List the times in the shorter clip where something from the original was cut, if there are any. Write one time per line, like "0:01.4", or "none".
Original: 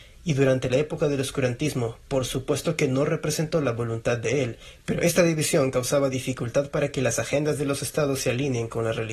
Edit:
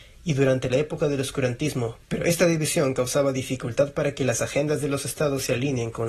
0:02.0